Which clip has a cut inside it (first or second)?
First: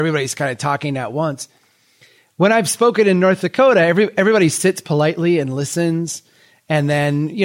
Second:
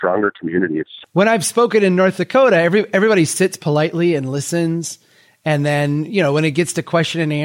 second